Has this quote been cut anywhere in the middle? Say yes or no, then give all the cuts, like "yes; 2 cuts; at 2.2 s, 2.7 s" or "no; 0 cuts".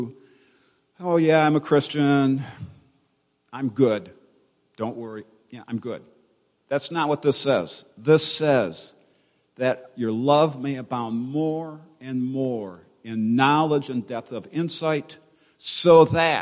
no; 0 cuts